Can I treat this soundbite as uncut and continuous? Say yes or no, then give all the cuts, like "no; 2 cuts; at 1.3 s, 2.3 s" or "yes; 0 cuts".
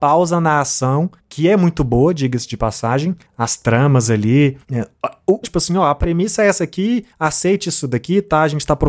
no; 1 cut; at 5.4 s